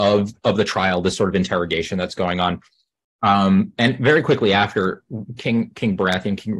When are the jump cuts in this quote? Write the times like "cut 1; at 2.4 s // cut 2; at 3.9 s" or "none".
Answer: none